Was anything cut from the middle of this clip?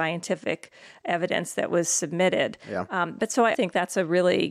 yes; 1 cut; at 3.5 s

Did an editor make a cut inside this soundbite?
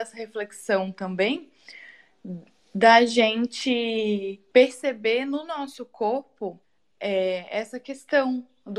no; 0 cuts

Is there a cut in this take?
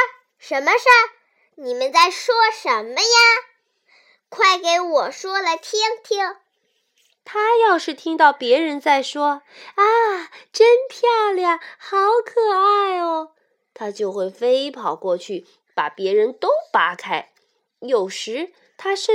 no; 0 cuts

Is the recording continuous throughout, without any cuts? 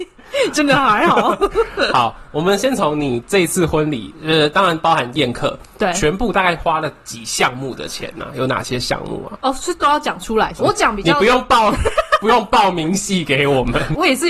no; 1 cut; at 10.6 s

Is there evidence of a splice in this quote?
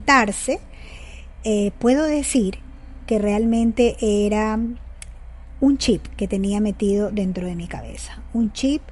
no; 0 cuts

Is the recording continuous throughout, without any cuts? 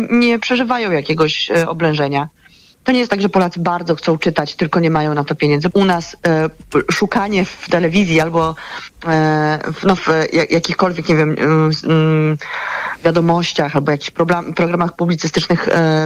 no; 2 cuts; at 5.7 s, 10.0 s

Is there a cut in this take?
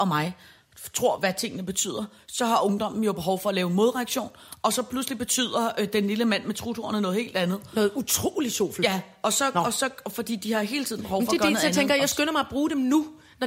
yes; 1 cut; at 1.2 s

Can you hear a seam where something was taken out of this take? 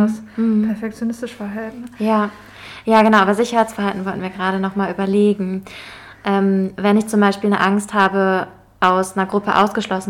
no; 0 cuts

